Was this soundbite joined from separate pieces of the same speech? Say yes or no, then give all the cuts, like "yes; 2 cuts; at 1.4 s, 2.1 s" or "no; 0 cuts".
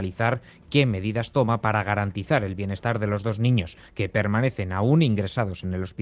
no; 0 cuts